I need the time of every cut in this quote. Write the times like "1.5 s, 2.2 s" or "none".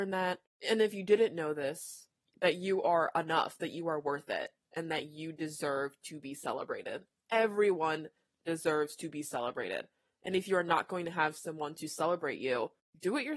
none